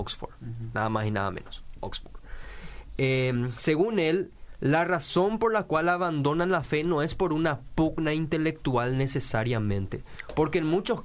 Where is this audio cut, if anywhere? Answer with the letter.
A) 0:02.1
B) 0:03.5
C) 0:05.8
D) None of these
D